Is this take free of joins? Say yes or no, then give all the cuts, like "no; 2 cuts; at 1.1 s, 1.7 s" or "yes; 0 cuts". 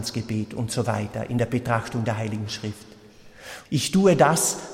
no; 1 cut; at 3.7 s